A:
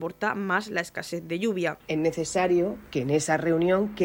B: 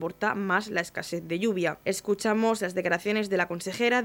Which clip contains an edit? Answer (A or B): A